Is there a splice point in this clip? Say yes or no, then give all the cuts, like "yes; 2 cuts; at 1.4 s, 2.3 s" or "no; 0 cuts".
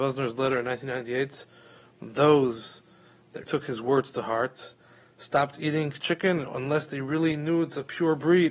yes; 1 cut; at 3.4 s